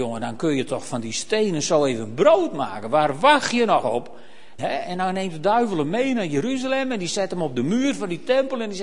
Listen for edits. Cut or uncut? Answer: cut